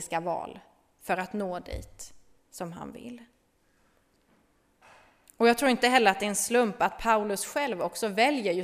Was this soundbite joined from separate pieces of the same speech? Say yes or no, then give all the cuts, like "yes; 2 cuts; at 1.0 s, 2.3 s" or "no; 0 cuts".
no; 0 cuts